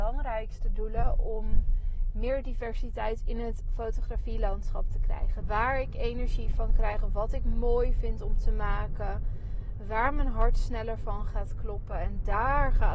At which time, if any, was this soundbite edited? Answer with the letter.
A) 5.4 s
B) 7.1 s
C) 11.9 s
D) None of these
A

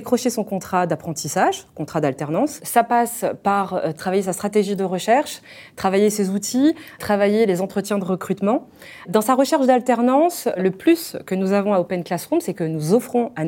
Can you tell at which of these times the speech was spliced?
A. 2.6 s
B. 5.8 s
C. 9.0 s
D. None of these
C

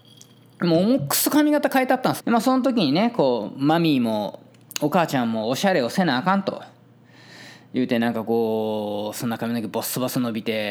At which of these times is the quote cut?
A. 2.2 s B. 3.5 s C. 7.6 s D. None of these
A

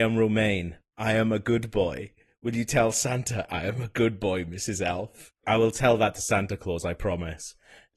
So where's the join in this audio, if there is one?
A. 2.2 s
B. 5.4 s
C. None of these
B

